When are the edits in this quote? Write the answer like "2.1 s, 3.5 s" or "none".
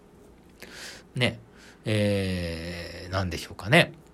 1.0 s